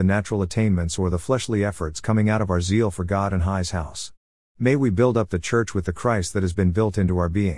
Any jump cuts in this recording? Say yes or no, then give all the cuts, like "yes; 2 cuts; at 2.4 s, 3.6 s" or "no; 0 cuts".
no; 0 cuts